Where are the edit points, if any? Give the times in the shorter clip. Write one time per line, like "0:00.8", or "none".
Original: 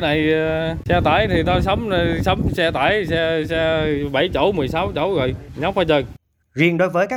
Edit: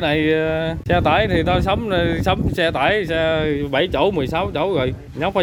0:03.1